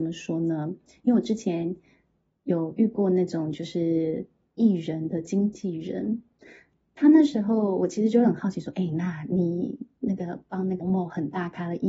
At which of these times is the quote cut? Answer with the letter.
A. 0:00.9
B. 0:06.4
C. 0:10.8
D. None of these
C